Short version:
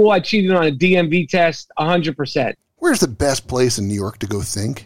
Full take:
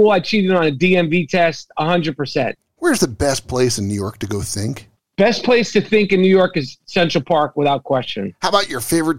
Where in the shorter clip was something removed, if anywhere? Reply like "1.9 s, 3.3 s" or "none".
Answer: none